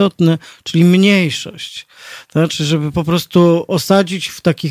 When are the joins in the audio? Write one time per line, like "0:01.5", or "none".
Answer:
none